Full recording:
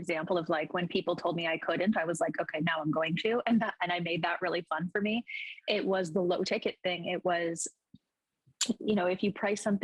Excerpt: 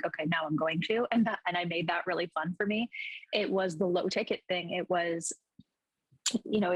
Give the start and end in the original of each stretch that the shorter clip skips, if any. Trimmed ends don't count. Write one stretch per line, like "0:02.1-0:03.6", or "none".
none